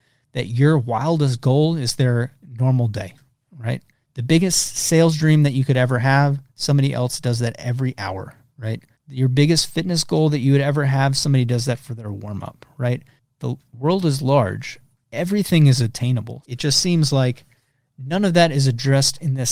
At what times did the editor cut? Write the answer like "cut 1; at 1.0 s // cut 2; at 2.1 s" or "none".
cut 1; at 16.4 s